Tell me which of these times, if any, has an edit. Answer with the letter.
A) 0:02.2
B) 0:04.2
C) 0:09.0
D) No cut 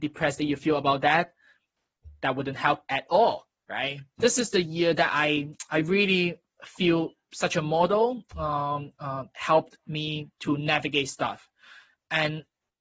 B